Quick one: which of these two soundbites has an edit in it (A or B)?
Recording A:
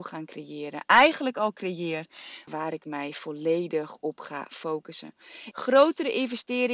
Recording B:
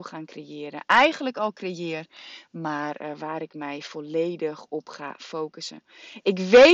A